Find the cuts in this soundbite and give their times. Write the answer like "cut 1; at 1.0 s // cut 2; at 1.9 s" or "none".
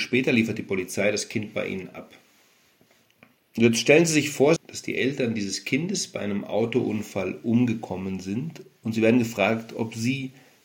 cut 1; at 3.4 s // cut 2; at 4.6 s